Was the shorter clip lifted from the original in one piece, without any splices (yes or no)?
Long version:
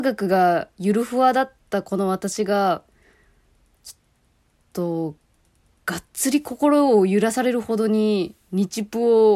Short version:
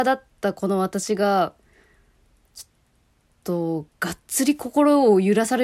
no